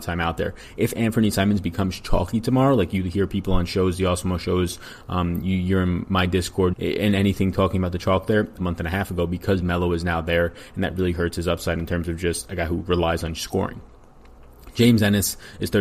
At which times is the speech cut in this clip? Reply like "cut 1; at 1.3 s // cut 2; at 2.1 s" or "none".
cut 1; at 6.7 s // cut 2; at 8.6 s